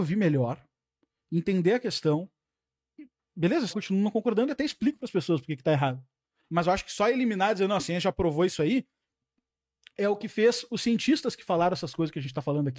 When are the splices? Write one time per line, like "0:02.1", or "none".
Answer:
0:03.7